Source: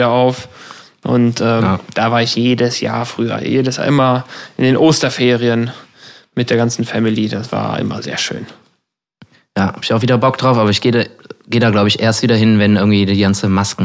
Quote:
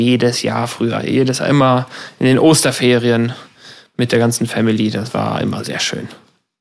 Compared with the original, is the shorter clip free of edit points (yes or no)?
yes